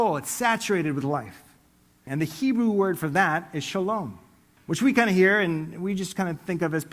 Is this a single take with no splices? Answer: no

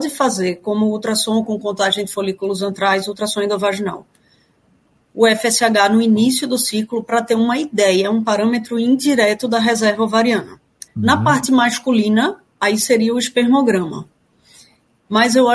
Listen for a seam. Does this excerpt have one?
yes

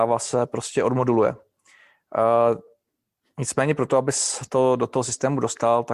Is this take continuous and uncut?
yes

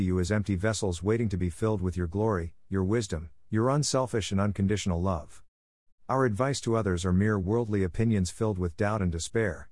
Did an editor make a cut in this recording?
yes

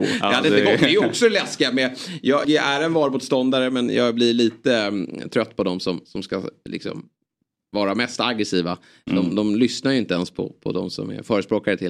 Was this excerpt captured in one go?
no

